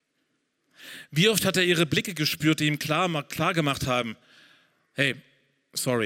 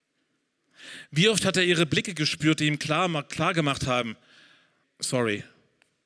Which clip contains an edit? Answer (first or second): second